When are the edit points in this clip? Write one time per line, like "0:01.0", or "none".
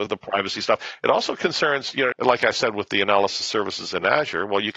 0:02.1